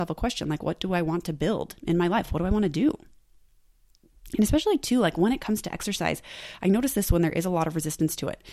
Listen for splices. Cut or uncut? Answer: uncut